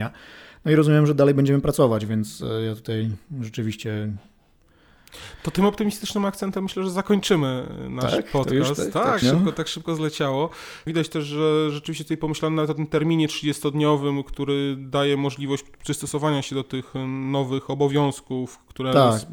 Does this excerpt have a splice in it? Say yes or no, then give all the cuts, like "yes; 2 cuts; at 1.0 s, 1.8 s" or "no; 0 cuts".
yes; 2 cuts; at 9.2 s, 10.9 s